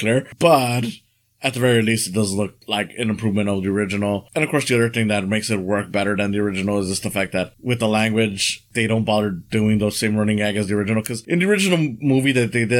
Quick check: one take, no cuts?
yes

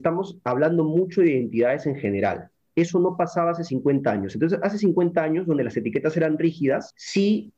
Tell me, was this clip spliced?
no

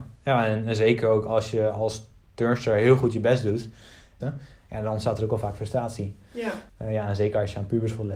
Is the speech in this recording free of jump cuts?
no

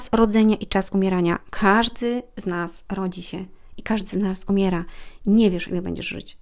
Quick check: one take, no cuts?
yes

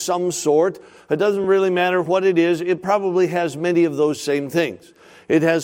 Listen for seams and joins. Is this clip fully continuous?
yes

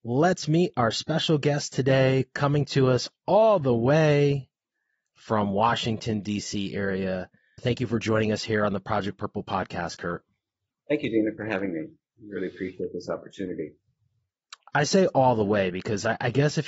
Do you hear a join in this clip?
yes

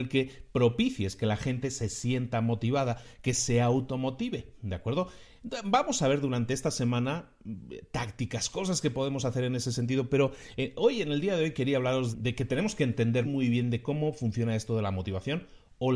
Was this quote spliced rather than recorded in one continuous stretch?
yes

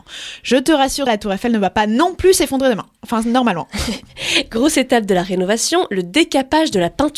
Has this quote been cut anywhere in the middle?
yes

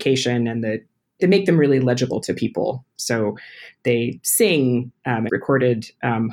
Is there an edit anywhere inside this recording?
yes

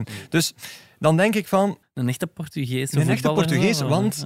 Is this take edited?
yes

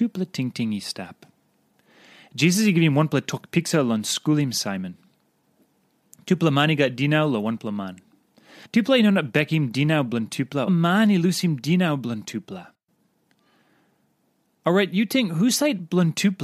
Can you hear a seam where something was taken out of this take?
yes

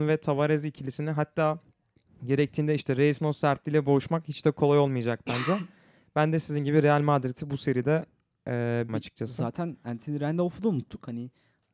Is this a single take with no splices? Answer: no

